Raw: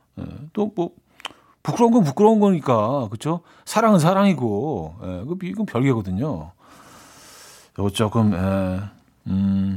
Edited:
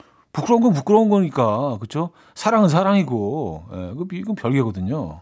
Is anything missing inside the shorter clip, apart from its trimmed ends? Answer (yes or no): no